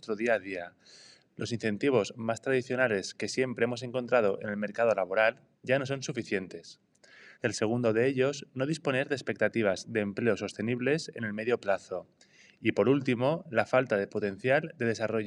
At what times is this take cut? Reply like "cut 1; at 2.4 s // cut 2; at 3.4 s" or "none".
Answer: cut 1; at 5.5 s // cut 2; at 7.3 s